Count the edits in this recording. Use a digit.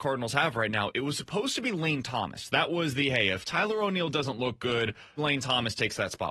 1